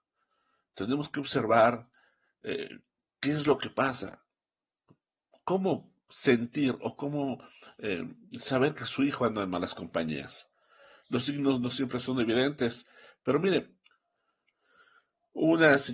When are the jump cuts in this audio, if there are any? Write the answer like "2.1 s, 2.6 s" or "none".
none